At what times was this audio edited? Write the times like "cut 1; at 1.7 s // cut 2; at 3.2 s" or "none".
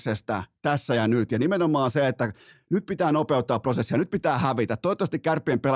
none